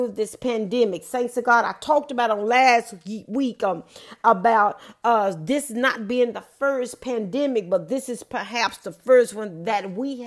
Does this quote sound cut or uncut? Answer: uncut